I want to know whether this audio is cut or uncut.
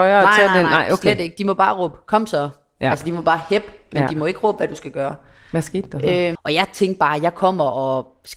cut